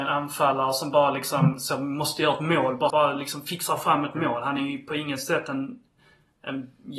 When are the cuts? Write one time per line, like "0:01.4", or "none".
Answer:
0:02.9